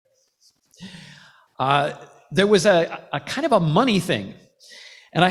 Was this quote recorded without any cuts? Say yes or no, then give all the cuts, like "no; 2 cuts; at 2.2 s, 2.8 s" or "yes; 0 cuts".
yes; 0 cuts